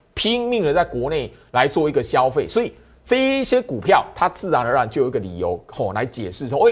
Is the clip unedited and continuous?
yes; 0 cuts

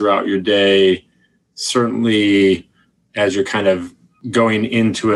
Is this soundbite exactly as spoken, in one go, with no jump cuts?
yes; 0 cuts

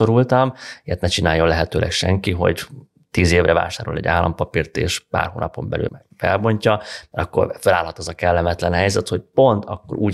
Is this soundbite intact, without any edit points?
no; 1 cut; at 5.9 s

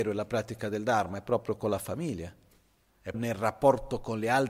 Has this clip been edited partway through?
yes; 1 cut; at 3.1 s

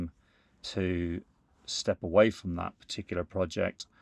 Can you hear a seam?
no; 0 cuts

